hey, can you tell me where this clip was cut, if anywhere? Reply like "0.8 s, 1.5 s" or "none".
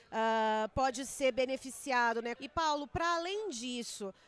2.4 s